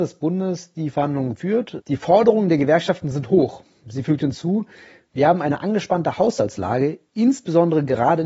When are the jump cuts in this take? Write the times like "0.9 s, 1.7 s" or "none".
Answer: 1.8 s